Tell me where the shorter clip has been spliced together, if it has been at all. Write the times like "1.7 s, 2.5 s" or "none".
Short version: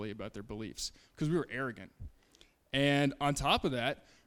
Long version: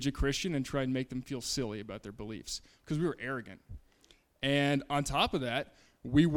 none